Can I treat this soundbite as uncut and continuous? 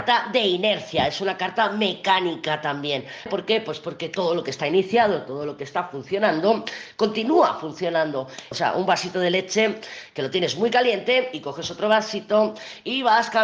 no; 2 cuts; at 3.3 s, 8.5 s

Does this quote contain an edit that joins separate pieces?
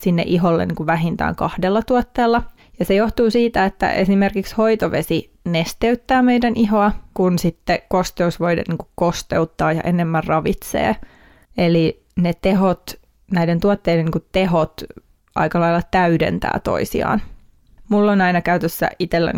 yes; 2 cuts; at 11.5 s, 17.8 s

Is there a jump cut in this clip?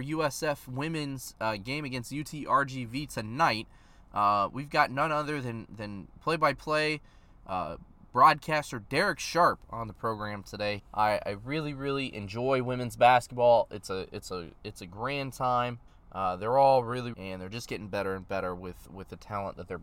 yes; 3 cuts; at 10.8 s, 15.9 s, 17.1 s

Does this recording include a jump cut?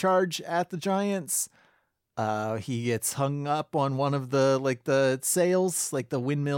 no; 0 cuts

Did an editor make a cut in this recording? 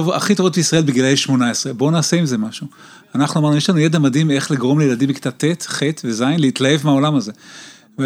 no; 0 cuts

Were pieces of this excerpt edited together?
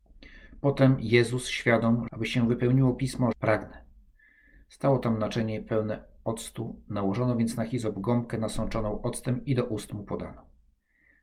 yes; 2 cuts; at 2.1 s, 3.3 s

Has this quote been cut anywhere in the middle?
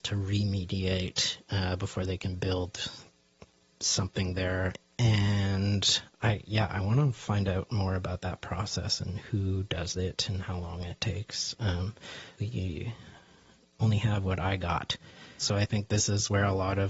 yes; 2 cuts; at 12.4 s, 15.4 s

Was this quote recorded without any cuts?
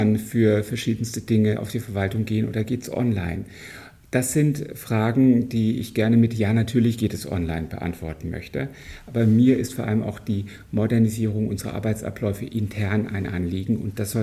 yes; 0 cuts

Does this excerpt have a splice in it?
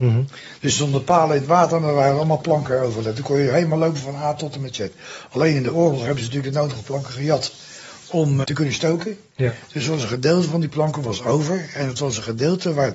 yes; 1 cut; at 8.4 s

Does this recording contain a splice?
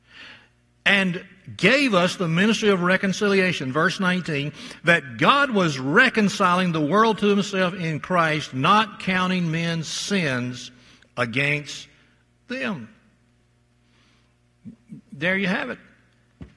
no; 0 cuts

